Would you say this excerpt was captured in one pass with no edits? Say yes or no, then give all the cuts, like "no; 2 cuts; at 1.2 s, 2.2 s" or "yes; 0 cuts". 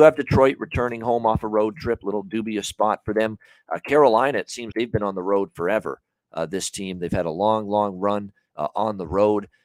no; 1 cut; at 4.7 s